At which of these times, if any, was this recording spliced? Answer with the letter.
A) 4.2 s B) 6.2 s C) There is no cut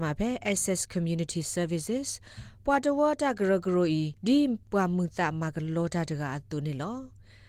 A